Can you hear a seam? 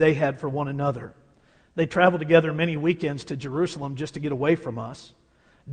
no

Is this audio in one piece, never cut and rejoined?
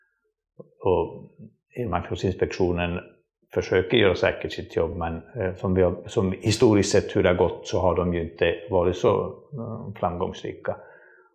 yes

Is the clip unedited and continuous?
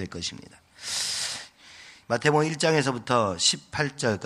no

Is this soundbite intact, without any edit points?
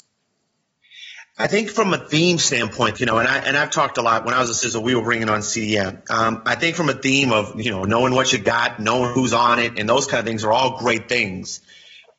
no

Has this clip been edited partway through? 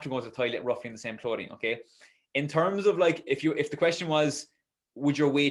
no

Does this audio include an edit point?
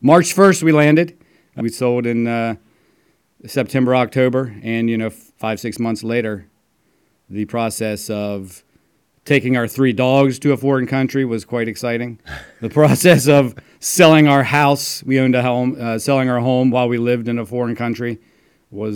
yes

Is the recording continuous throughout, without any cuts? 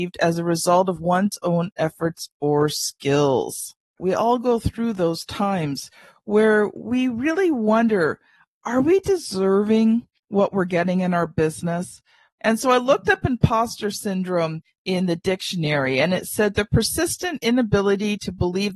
no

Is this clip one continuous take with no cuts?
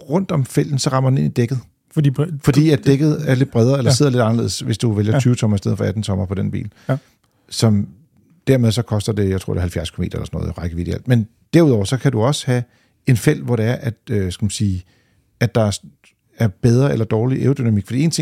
yes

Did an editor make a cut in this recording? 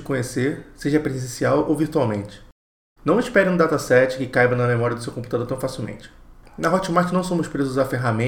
yes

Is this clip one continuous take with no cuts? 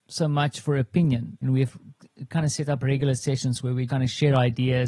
no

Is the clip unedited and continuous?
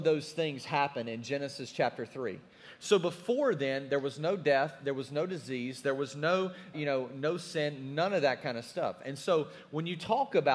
no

